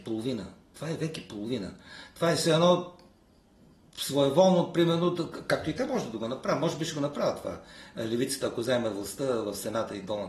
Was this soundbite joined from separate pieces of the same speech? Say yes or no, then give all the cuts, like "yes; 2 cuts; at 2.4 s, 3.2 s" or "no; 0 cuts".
no; 0 cuts